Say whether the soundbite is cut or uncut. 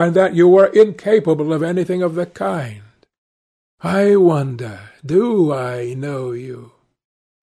cut